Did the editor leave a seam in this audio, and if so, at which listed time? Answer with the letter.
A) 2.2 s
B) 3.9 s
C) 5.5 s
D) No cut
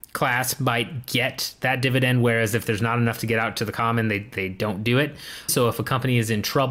C